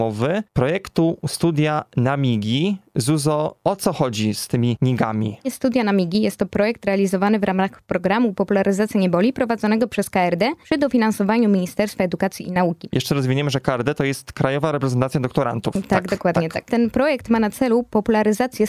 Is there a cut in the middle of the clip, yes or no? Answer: no